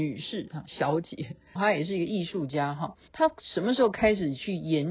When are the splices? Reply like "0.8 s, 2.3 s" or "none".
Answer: 1.6 s, 3.1 s